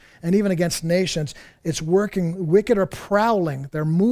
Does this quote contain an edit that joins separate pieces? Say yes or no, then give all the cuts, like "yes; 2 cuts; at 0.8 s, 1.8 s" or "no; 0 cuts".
no; 0 cuts